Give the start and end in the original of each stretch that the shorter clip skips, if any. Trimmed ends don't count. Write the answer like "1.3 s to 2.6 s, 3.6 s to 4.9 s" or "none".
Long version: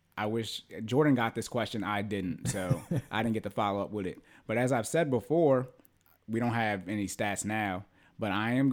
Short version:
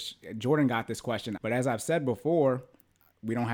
1.8 s to 4.4 s